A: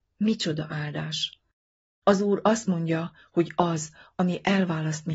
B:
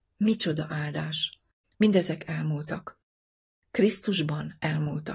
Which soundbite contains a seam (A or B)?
B